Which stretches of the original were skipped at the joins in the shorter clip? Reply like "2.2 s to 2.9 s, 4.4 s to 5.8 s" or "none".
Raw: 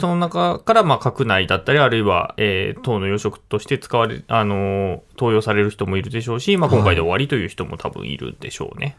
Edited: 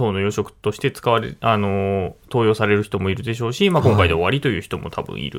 none

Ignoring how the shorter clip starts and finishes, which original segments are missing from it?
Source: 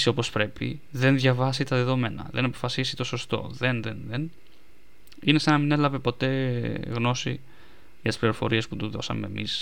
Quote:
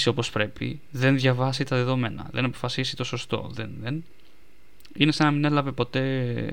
3.6 s to 3.8 s

